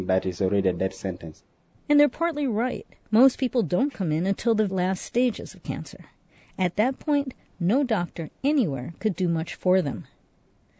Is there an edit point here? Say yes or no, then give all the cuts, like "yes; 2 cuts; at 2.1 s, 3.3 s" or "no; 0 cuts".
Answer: yes; 1 cut; at 4.7 s